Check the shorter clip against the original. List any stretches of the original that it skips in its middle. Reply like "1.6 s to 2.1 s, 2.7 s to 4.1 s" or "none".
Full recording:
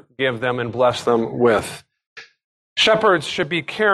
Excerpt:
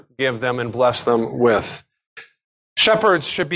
none